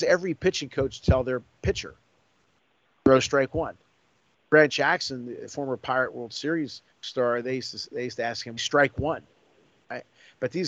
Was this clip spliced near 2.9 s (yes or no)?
no